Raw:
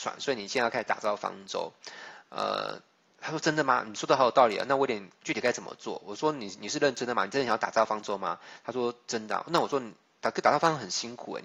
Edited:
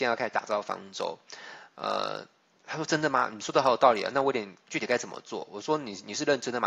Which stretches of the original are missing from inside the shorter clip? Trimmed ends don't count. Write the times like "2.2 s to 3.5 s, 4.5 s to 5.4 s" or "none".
none